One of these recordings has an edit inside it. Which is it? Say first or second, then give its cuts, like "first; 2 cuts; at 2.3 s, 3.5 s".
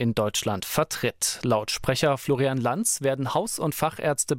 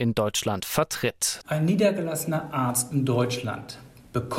second; 1 cut; at 1.4 s